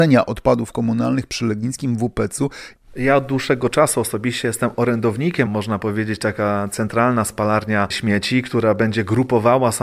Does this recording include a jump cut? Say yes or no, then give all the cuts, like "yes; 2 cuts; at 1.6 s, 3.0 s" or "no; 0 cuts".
yes; 2 cuts; at 2.8 s, 5.5 s